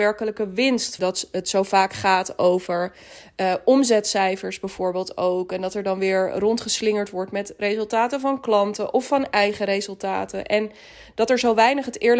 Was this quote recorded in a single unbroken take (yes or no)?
no